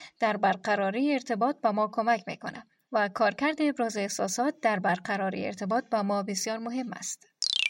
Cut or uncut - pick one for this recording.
uncut